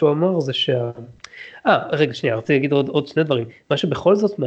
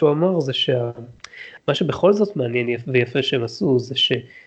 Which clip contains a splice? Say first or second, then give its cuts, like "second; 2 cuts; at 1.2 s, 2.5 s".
second; 1 cut; at 1.6 s